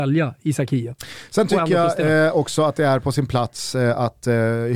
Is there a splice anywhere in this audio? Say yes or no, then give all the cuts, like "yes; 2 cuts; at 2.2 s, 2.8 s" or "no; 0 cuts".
no; 0 cuts